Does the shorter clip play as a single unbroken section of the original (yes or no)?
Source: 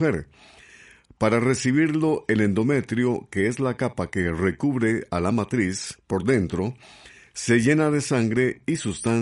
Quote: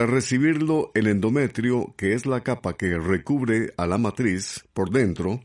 yes